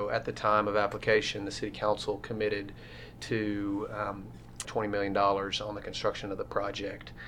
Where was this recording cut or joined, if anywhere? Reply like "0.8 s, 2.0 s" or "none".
4.6 s

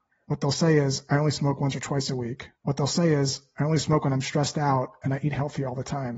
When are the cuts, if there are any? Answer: 2.6 s

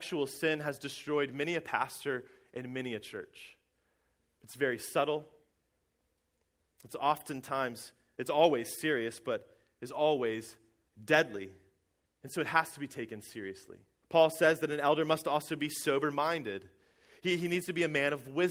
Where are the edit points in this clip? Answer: 14.0 s

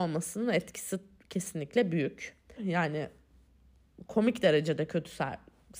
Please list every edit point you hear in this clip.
2.6 s

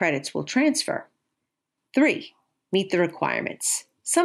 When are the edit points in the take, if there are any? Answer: 1.8 s

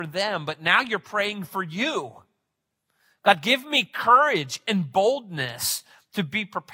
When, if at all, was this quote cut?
none

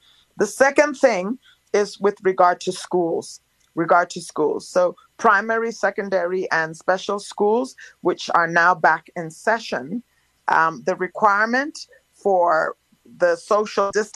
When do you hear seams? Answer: none

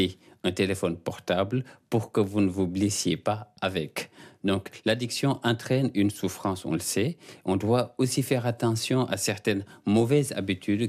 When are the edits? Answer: none

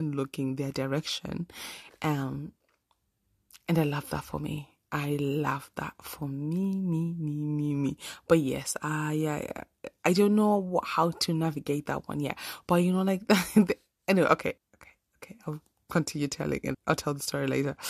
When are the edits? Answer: 14.6 s, 16.7 s

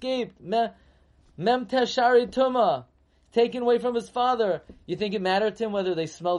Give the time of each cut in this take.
4.8 s

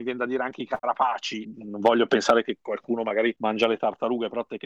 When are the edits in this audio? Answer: 1.4 s

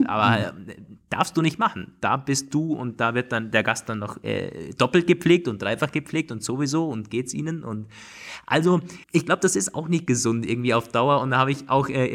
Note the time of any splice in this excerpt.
9.0 s

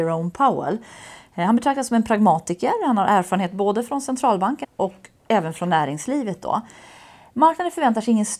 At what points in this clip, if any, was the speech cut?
4.6 s

